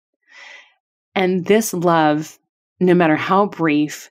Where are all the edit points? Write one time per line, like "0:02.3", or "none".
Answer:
none